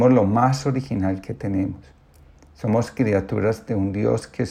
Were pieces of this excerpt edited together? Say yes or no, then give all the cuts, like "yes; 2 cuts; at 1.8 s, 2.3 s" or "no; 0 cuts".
no; 0 cuts